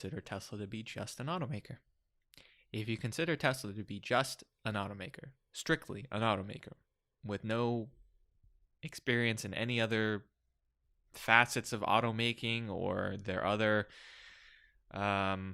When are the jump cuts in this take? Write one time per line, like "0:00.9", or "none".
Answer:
none